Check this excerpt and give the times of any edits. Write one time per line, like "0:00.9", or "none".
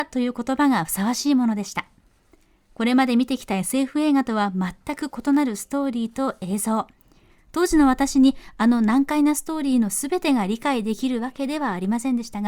none

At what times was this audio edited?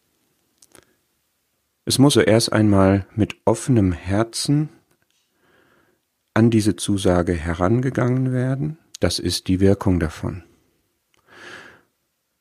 0:02.1
0:08.9

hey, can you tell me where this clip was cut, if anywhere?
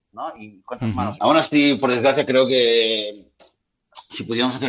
0:01.2

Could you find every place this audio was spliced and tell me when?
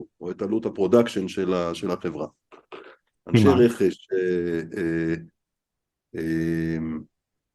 0:03.1

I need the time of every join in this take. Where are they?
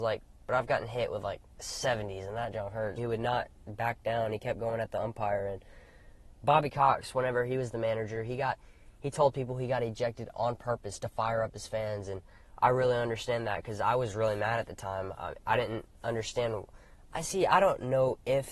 0:03.0

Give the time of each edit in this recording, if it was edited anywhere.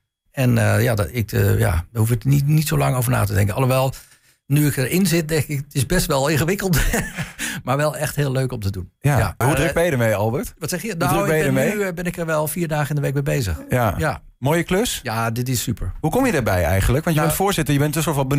0:09.4

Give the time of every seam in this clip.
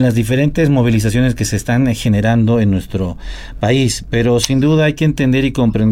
none

